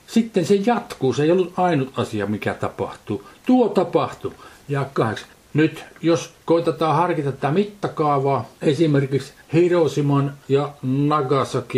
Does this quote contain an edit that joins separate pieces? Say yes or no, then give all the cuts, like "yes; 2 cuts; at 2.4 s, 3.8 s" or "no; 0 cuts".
yes; 2 cuts; at 5.3 s, 9.4 s